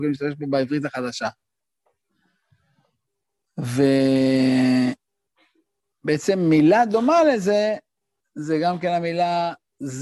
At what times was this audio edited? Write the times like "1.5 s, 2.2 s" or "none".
none